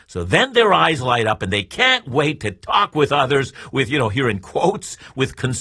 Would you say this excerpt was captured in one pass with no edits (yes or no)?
yes